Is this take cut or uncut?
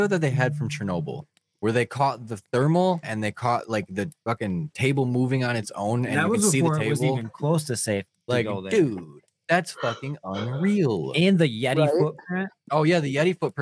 cut